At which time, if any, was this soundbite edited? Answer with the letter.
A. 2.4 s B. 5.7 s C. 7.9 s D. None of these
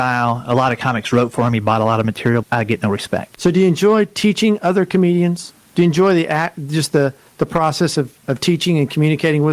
A